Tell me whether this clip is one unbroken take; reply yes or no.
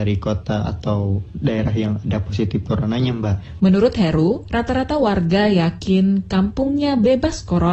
no